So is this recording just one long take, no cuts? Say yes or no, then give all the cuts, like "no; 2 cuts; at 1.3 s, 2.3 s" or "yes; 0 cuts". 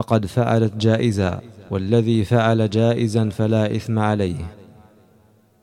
yes; 0 cuts